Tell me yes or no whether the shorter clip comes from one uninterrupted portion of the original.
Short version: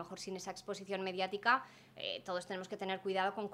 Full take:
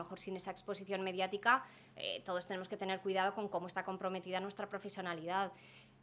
yes